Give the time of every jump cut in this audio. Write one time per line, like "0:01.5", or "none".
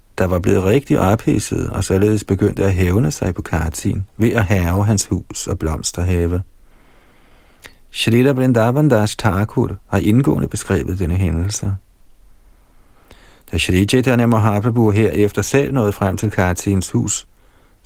0:04.1